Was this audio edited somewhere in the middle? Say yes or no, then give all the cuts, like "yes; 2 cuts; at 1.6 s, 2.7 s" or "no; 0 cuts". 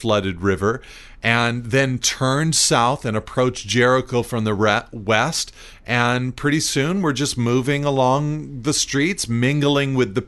no; 0 cuts